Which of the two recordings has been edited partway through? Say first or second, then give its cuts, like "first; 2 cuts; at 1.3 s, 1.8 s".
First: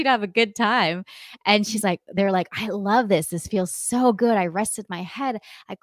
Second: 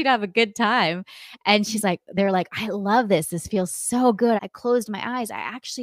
second; 1 cut; at 4.4 s